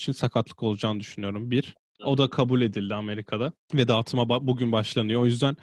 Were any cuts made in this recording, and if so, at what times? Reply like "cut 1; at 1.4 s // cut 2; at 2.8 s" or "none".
cut 1; at 2.0 s // cut 2; at 3.6 s